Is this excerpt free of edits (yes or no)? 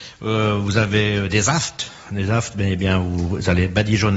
yes